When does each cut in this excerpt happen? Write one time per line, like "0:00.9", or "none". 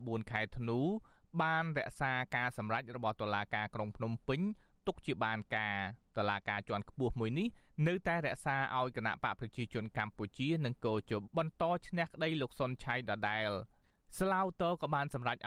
0:11.2